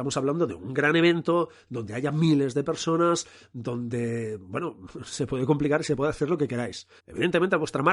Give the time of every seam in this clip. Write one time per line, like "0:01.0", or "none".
0:07.0